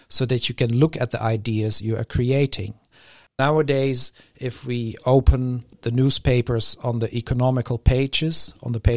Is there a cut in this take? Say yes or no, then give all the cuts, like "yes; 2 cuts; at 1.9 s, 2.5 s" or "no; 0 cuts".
yes; 2 cuts; at 3.3 s, 5.7 s